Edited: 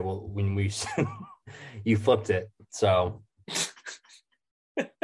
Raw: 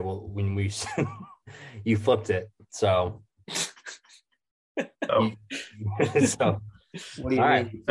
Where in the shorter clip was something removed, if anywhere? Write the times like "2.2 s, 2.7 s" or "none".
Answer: none